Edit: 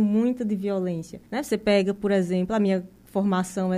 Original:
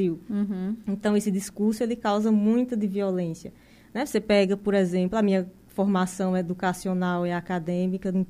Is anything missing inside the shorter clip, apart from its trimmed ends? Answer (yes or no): yes